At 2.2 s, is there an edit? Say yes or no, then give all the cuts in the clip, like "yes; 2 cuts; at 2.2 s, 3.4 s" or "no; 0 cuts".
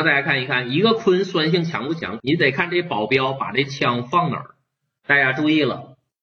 yes; 1 cut; at 2.2 s